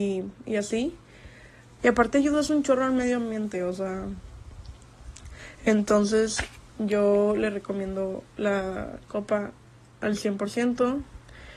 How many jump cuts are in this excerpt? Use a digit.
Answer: 1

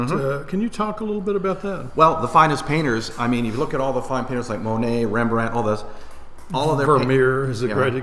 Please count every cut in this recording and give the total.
0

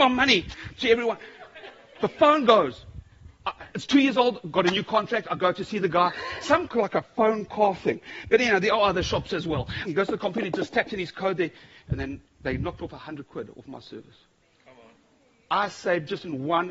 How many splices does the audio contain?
2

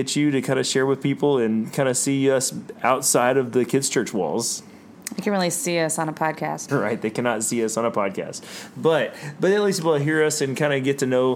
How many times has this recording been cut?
1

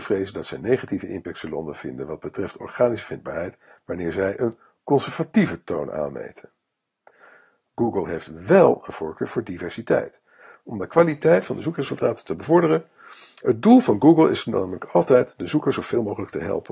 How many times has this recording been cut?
0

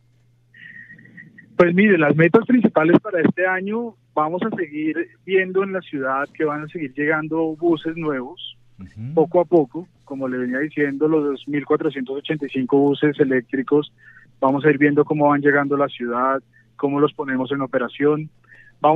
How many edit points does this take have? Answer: 0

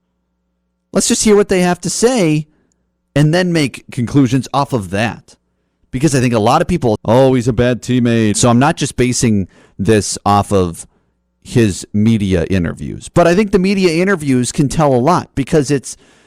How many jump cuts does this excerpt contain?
2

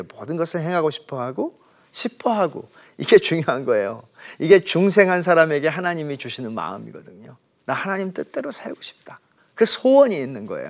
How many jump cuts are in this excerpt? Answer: 1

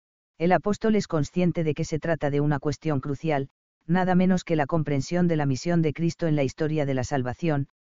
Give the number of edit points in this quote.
0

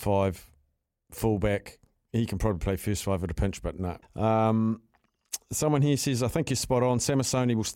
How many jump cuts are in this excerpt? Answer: 1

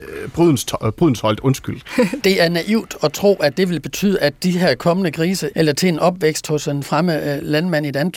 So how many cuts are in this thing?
2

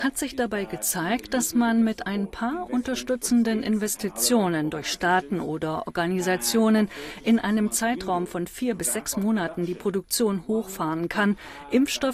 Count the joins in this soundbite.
0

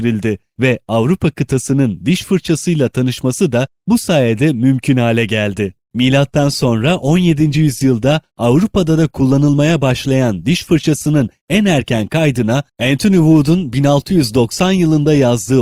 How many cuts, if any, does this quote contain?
0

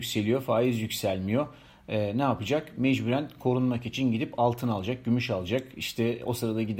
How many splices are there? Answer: 0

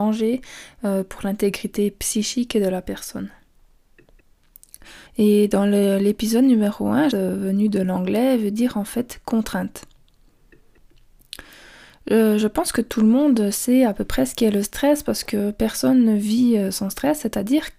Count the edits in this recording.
2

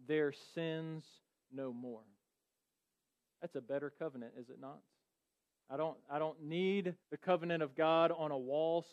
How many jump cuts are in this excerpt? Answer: 2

